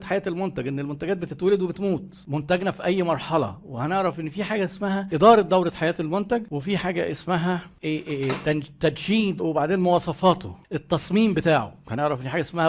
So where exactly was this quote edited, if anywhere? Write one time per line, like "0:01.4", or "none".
0:09.4